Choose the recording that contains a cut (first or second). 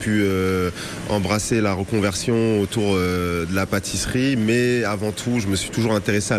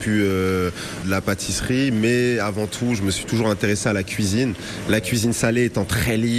second